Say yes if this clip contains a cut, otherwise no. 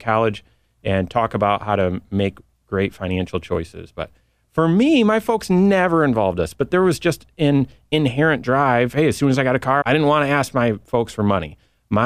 yes